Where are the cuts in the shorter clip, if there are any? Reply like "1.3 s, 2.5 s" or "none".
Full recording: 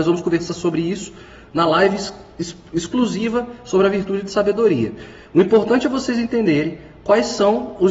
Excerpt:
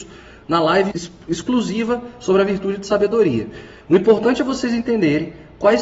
0.9 s